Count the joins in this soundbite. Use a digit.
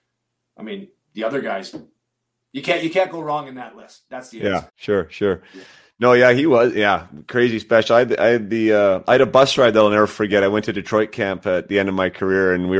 1